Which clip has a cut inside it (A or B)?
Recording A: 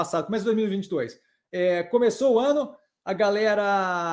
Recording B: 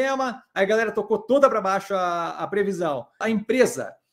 B